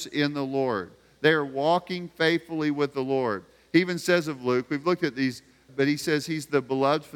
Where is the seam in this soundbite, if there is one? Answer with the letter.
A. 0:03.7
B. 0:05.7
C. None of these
B